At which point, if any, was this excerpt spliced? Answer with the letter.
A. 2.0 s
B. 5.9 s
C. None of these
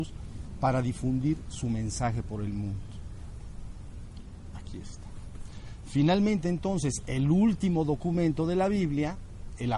C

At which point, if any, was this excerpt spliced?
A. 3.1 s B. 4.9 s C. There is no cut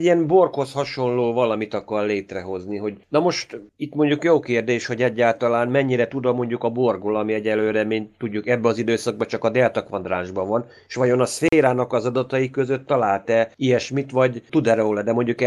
C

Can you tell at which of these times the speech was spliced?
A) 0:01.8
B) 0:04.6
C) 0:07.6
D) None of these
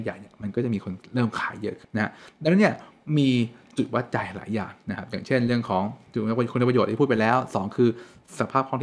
A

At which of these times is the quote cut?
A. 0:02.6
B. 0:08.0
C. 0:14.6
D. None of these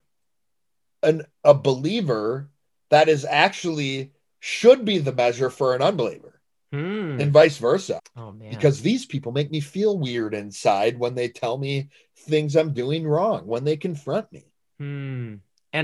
B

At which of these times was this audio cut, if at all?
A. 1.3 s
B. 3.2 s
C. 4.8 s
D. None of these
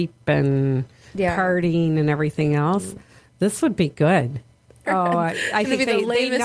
C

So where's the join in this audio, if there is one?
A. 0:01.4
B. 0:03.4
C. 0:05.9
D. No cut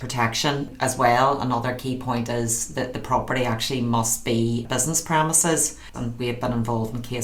C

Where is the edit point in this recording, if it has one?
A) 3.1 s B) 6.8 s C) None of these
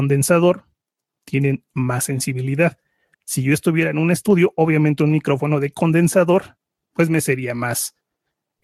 A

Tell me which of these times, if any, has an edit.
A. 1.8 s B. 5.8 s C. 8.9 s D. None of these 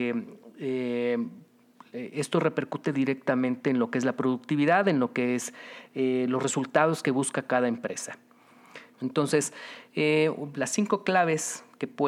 C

